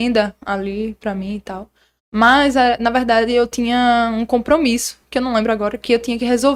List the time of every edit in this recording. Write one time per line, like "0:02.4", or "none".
none